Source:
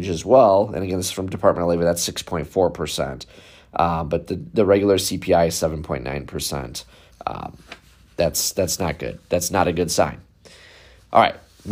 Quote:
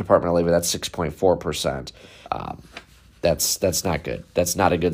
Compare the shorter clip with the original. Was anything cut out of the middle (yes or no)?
yes